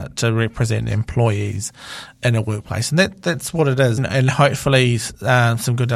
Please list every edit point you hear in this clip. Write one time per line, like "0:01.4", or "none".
0:04.0